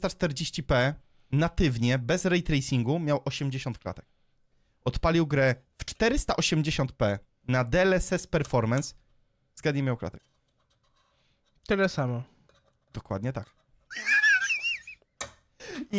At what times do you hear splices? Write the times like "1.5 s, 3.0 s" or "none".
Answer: none